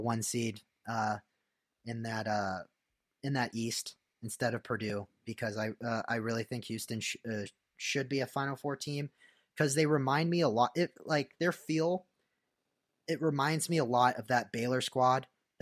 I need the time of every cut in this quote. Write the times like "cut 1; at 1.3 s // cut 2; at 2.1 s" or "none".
none